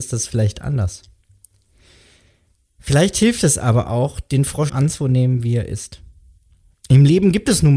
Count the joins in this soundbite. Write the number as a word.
one